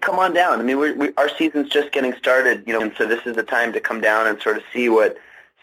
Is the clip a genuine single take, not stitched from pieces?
no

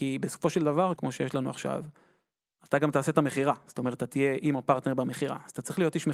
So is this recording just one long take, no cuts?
no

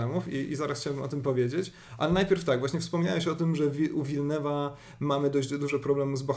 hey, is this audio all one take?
yes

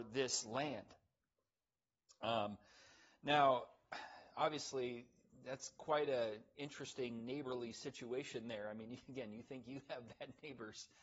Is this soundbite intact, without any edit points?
yes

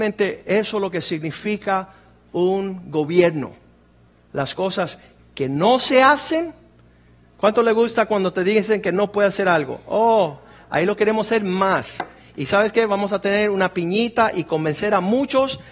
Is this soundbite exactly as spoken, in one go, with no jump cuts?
no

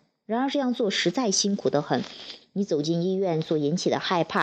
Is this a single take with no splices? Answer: no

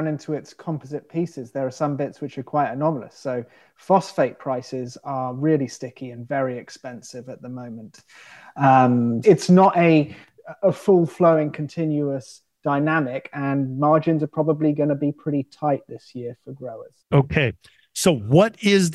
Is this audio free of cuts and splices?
no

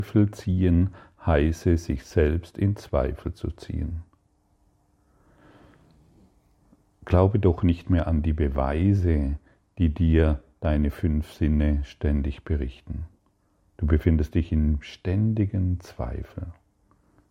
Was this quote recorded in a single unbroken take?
yes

